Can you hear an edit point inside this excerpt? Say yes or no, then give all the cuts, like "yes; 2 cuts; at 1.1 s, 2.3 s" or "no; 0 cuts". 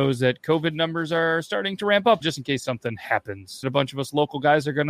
yes; 2 cuts; at 2.2 s, 3.6 s